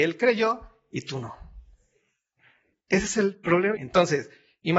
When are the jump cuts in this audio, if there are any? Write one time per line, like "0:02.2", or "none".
0:02.7
0:03.7